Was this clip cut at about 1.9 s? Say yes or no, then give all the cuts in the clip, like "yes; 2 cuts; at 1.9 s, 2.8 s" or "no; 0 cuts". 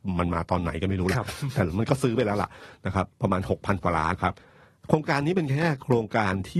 no; 1 cut; at 4.1 s